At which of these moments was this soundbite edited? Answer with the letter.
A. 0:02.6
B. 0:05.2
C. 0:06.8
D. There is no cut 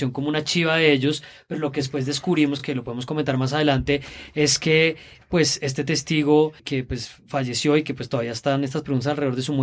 D